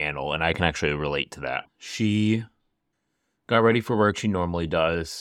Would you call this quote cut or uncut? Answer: cut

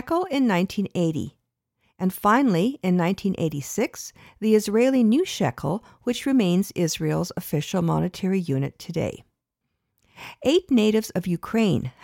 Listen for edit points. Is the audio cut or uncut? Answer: uncut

